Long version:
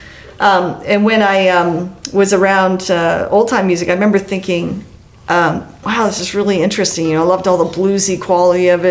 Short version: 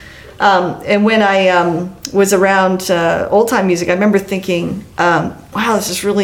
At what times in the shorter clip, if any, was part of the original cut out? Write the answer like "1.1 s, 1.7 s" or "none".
4.9 s